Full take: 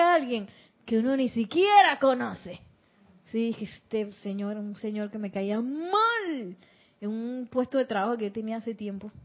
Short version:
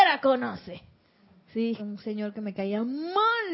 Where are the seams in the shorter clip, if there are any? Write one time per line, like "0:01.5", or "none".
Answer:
0:01.8